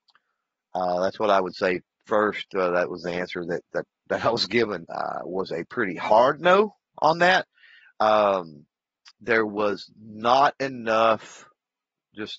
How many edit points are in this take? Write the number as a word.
one